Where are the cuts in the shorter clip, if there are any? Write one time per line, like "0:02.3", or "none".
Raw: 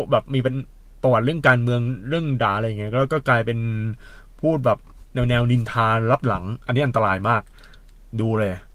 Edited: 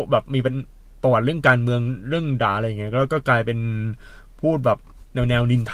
none

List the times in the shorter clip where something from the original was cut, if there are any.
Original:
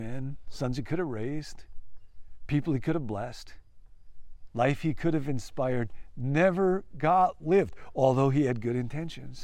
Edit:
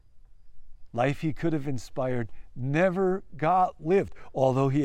none

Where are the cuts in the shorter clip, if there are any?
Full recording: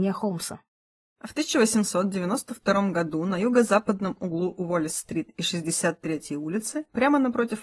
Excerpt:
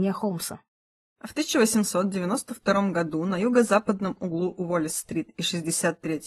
none

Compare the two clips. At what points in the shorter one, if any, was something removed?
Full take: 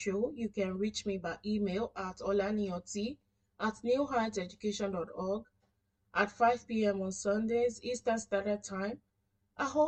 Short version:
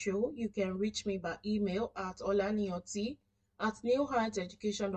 none

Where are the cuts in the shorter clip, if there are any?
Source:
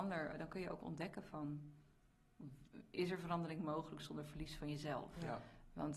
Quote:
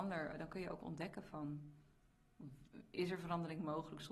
none

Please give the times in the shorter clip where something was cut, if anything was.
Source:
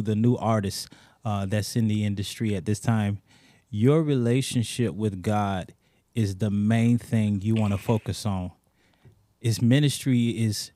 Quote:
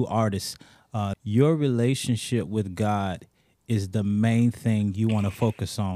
0:01.1

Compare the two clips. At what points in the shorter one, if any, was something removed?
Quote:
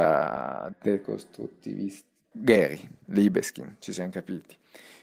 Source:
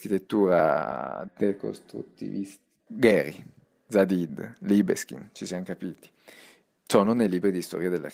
0:03.0

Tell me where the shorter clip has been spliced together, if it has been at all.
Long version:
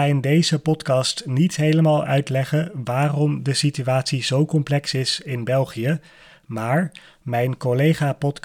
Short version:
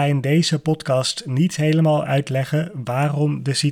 none

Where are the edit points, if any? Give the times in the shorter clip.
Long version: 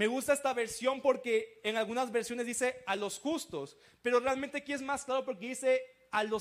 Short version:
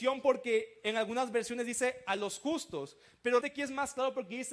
0:03.4

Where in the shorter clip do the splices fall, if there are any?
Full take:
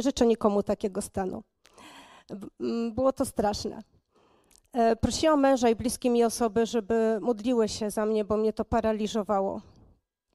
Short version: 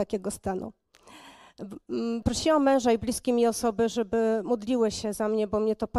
0:02.2

